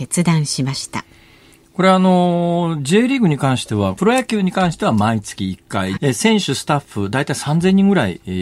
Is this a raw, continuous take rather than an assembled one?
no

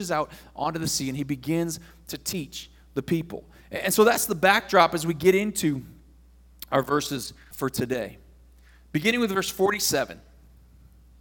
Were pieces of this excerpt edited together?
yes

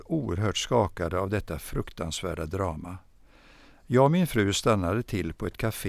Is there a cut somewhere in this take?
no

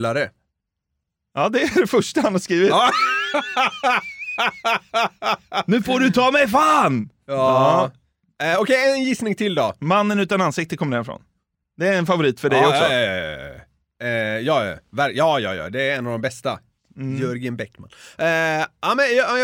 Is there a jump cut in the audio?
no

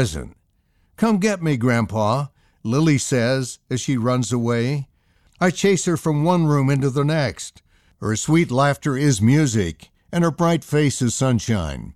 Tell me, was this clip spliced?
no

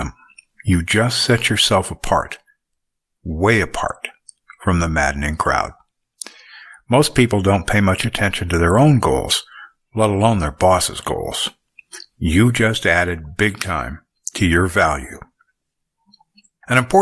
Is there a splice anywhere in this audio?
no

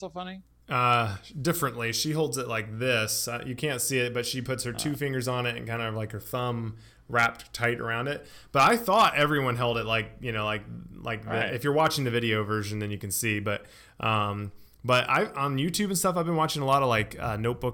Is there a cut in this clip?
no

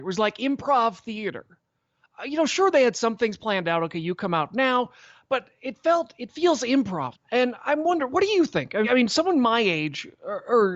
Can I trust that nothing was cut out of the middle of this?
no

